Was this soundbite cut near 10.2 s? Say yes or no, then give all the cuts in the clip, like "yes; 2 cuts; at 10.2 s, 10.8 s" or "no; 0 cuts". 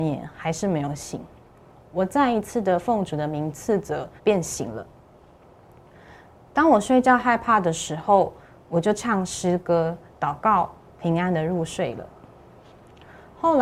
no; 1 cut; at 4.2 s